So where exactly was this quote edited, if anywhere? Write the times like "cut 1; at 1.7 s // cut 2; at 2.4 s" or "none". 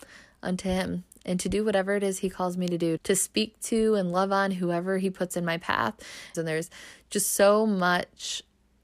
cut 1; at 3.0 s // cut 2; at 6.3 s